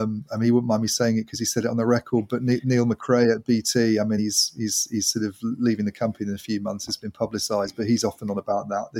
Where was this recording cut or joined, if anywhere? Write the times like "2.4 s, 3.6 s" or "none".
none